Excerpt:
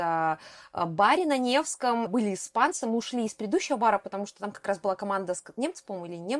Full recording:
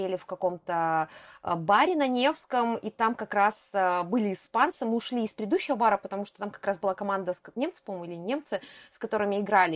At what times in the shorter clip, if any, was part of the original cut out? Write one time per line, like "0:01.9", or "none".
0:02.1